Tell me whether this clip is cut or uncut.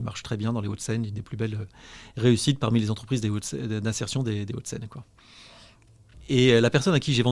uncut